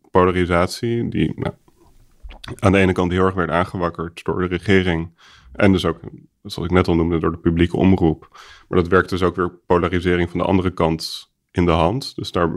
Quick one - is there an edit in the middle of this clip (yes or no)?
no